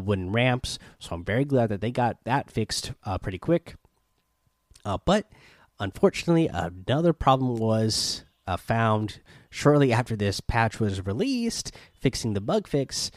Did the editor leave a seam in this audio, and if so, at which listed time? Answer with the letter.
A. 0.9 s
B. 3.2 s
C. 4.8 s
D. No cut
D